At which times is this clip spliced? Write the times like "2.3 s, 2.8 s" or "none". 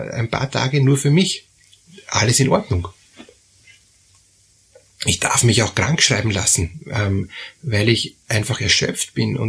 none

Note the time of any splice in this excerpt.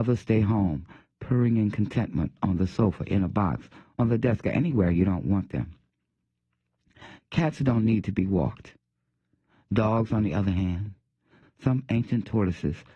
11.4 s

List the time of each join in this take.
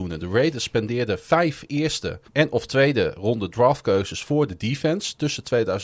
2.3 s

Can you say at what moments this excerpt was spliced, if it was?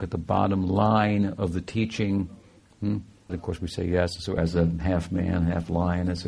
3.3 s, 4.4 s

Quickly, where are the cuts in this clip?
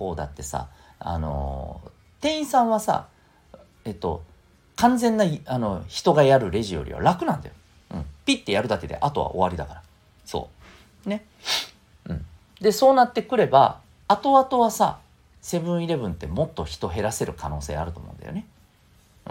none

